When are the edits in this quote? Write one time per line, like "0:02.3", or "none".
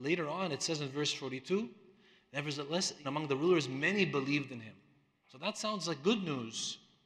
0:03.0